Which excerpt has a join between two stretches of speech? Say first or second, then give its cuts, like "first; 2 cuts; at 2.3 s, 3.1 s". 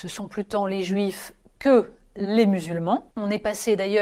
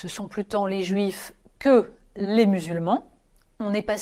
first; 1 cut; at 3.1 s